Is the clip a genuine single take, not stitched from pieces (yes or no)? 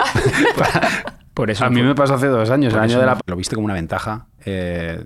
no